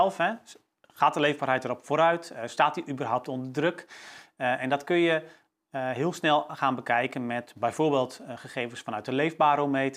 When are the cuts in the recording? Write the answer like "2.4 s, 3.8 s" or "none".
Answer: none